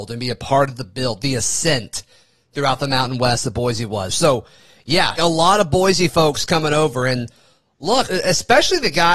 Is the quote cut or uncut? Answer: cut